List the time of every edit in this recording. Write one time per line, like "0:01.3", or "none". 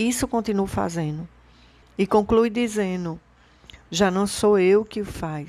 0:01.8
0:03.9